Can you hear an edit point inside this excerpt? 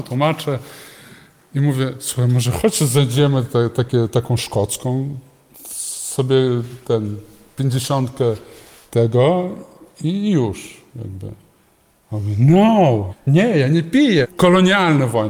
yes; 2 cuts; at 13.1 s, 14.2 s

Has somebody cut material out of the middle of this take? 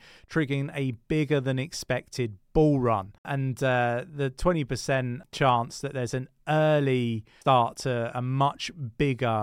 yes; 1 cut; at 3.2 s

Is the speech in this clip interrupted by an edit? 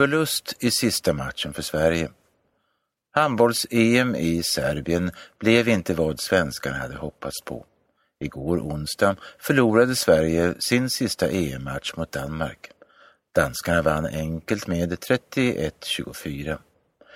no; 0 cuts

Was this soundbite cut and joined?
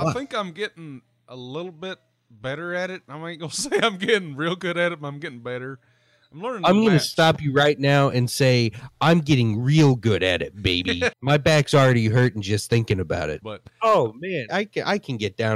yes; 3 cuts; at 11.1 s, 13.4 s, 14.5 s

